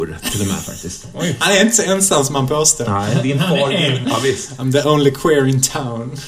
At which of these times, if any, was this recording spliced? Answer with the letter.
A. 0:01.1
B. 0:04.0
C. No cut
B